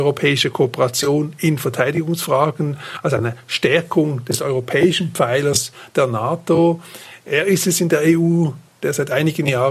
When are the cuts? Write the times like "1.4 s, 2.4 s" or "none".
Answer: none